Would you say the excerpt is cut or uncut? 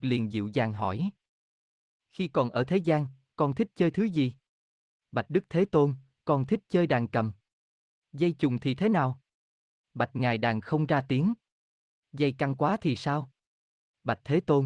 uncut